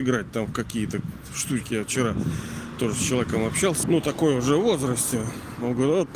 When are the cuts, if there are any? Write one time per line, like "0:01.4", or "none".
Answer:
0:03.8